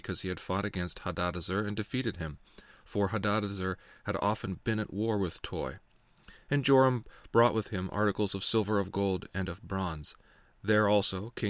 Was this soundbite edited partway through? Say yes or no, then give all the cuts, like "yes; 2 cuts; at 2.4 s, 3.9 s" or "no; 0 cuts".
no; 0 cuts